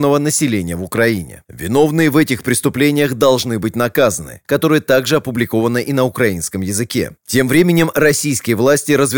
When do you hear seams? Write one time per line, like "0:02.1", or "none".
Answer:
0:04.4
0:07.2